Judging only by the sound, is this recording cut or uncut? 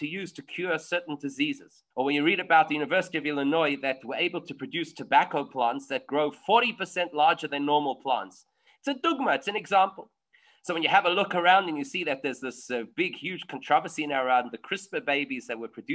cut